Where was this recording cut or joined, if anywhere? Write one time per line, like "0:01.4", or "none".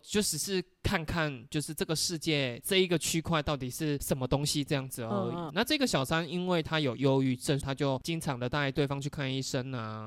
0:05.5
0:07.6